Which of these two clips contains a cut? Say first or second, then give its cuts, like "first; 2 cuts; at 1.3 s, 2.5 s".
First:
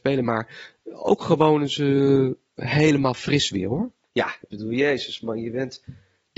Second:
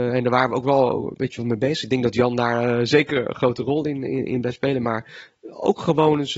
first; 1 cut; at 4.0 s